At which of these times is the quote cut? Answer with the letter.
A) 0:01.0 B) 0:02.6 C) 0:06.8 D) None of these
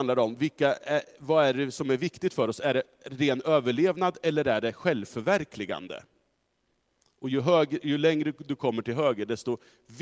D